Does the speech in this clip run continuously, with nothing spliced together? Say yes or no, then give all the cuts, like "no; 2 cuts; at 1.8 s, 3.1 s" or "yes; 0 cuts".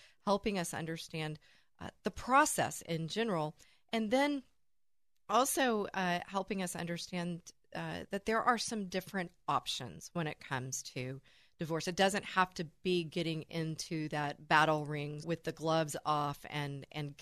no; 1 cut; at 15.2 s